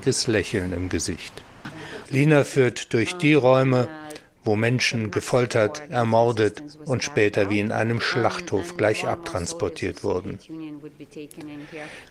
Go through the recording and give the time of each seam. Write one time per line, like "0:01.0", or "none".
0:02.0